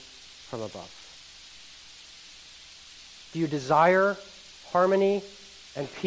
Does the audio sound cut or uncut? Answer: cut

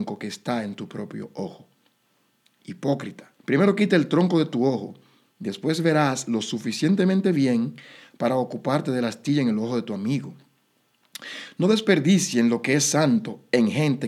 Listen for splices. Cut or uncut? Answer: cut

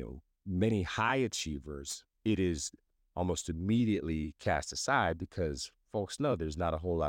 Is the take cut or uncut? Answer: cut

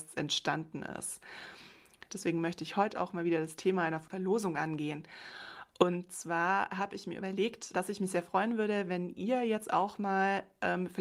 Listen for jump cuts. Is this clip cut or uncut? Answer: cut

